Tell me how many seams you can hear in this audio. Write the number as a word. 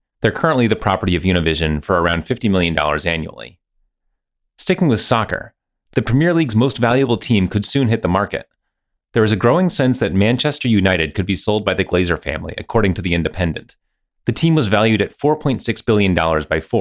zero